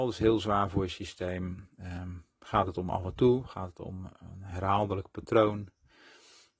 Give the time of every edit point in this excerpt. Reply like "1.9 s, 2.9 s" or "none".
none